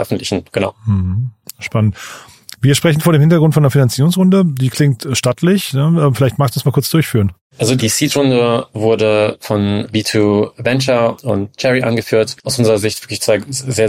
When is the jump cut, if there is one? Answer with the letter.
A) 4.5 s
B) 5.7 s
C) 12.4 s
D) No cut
C